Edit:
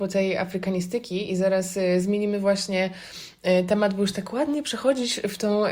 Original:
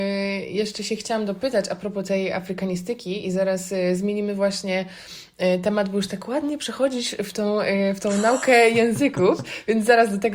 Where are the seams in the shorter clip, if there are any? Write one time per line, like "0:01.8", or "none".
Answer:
none